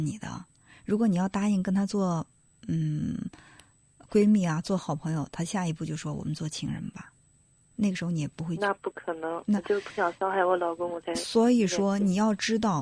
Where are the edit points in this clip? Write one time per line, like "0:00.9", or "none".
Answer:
none